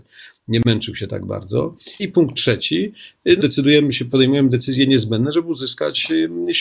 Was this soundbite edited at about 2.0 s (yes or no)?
yes